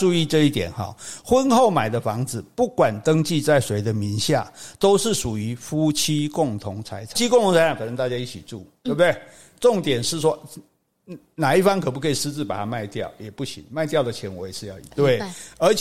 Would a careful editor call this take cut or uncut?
cut